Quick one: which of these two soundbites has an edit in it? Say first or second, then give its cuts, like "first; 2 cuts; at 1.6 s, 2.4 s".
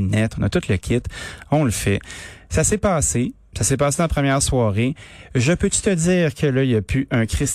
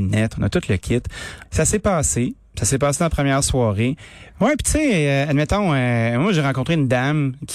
second; 2 cuts; at 1.4 s, 4.3 s